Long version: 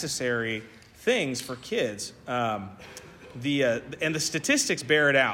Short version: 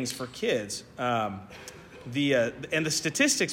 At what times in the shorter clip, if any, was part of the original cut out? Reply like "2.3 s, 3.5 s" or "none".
none